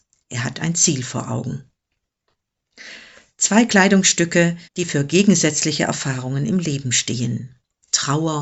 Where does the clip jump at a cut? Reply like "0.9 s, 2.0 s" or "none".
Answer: 4.7 s